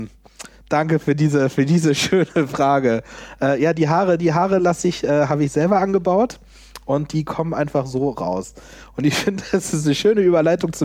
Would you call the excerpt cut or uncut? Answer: uncut